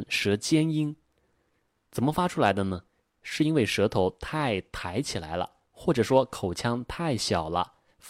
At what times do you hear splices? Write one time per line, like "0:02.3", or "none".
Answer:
none